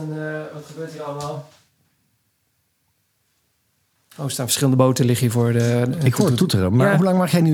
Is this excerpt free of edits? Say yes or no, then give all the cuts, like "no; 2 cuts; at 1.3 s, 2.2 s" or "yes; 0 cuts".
yes; 0 cuts